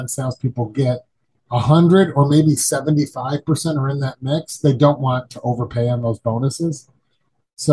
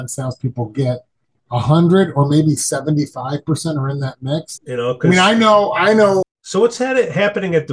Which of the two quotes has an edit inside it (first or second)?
second